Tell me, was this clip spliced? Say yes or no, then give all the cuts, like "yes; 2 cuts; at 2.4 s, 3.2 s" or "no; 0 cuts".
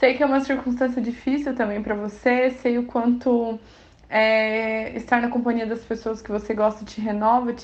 no; 0 cuts